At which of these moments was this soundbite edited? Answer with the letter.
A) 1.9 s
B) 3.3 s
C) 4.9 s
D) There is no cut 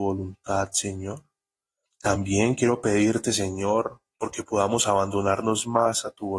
A